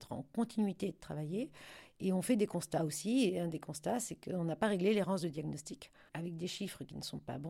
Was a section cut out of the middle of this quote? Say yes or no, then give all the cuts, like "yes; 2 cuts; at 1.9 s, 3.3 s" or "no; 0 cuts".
yes; 1 cut; at 6.1 s